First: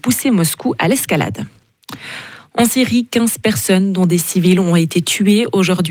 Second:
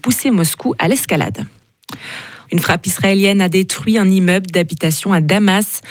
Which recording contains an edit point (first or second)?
second